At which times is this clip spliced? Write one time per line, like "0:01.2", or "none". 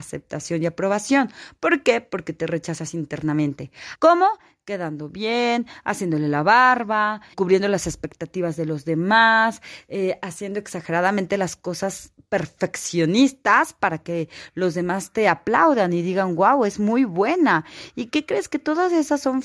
0:04.0
0:07.3